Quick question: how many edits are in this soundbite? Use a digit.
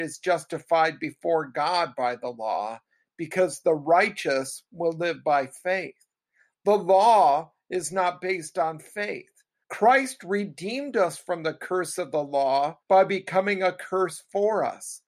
2